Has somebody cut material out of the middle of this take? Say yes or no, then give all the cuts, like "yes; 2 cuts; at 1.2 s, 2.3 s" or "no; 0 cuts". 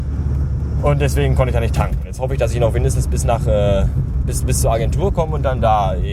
no; 0 cuts